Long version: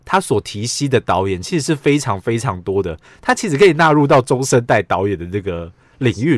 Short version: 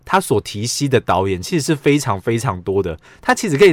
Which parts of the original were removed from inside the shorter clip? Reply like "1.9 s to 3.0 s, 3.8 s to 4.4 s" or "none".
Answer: none